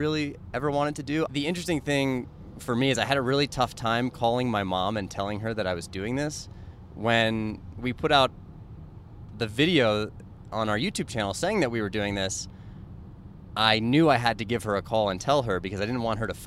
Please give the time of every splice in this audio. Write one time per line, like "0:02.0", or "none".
0:01.3